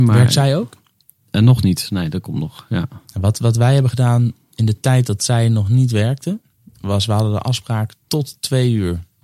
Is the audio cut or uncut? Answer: uncut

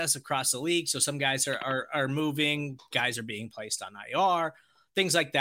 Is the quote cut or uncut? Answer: uncut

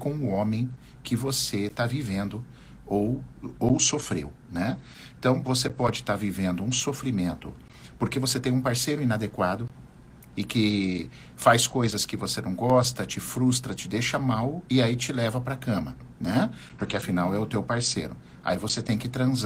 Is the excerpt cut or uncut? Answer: uncut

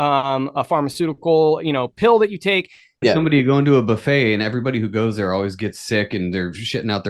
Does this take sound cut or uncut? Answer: cut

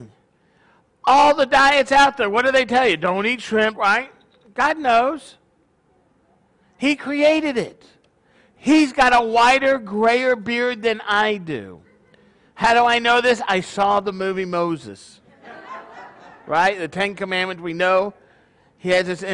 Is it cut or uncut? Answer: cut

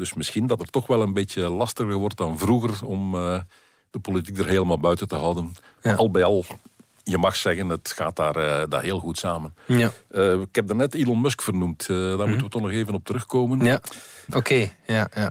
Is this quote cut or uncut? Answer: cut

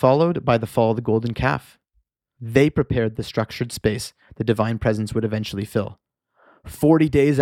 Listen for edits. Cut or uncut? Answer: cut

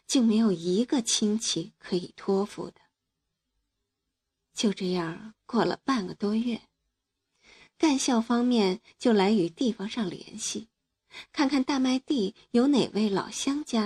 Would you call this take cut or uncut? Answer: uncut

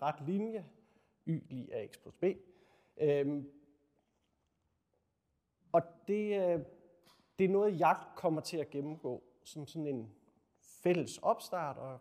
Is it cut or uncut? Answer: uncut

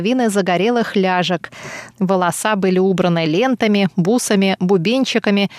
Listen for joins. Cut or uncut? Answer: cut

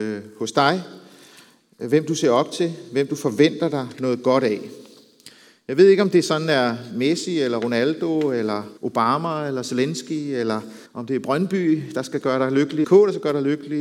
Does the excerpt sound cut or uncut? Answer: cut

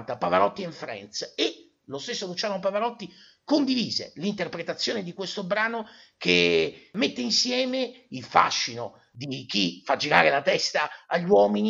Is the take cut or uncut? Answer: uncut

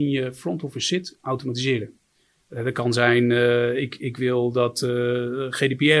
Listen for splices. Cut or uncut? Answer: uncut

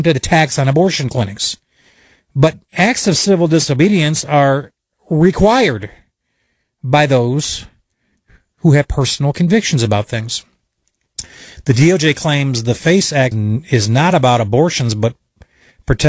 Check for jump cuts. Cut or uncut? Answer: cut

